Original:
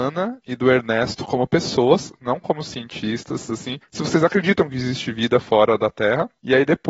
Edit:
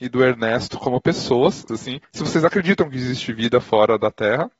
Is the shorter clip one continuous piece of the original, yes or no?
no